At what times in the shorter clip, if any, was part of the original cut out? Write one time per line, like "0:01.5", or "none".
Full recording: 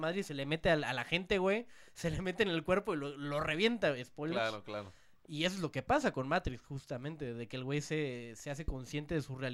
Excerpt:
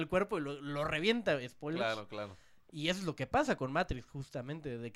none